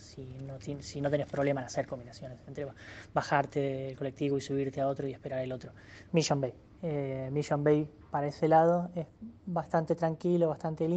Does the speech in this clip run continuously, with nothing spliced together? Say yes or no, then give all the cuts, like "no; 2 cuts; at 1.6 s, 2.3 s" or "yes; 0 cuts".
no; 1 cut; at 6.1 s